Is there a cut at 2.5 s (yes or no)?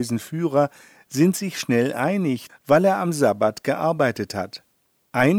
yes